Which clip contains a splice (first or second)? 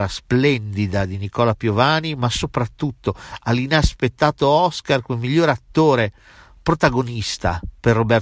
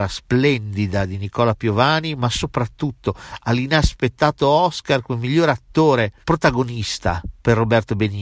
second